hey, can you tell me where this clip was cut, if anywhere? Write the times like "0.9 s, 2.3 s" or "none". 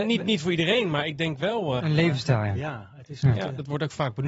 1.8 s